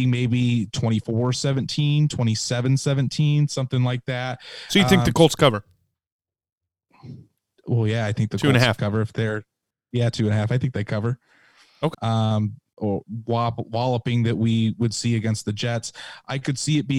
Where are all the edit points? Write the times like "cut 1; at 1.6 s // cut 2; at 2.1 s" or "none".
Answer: cut 1; at 11.9 s